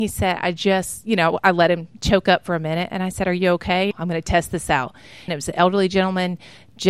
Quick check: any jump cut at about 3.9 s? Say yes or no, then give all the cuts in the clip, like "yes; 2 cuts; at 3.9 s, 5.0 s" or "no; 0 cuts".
yes; 2 cuts; at 3.9 s, 5.3 s